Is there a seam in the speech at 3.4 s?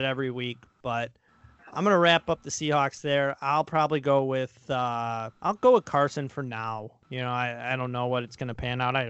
no; 1 cut; at 5.3 s

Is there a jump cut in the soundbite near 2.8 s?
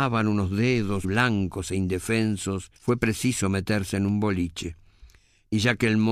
yes; 2 cuts; at 1.0 s, 2.8 s

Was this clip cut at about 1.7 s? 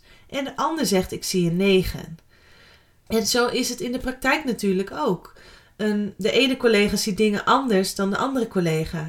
no; 2 cuts; at 3.1 s, 6.2 s

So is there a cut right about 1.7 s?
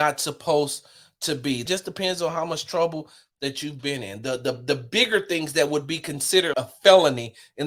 yes; 2 cuts; at 1.7 s, 6.5 s

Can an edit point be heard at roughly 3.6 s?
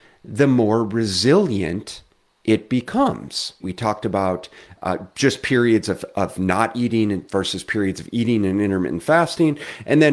yes; 1 cut; at 3.6 s

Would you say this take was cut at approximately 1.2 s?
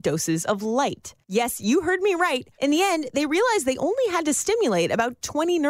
yes; 2 cuts; at 1.2 s, 2.6 s

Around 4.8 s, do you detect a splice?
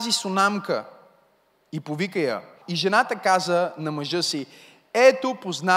no; 1 cut; at 2.6 s

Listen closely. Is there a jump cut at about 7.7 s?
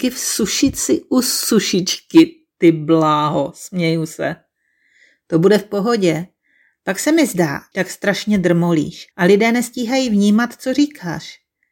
yes; 2 cuts; at 7.7 s, 9.1 s

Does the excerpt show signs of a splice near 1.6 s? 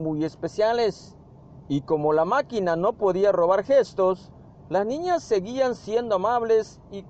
yes; 1 cut; at 1.6 s

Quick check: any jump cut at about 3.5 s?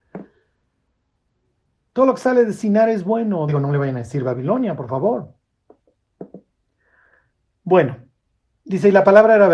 no; 0 cuts

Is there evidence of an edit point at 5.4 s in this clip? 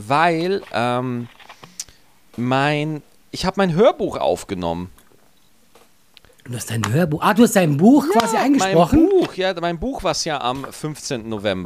no; 0 cuts

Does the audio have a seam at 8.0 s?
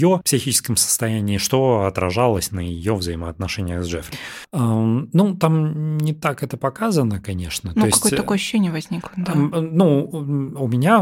no; 1 cut; at 4.4 s

